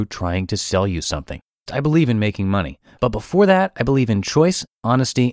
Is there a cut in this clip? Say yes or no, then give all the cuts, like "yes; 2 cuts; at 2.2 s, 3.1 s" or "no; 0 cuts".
yes; 1 cut; at 1.7 s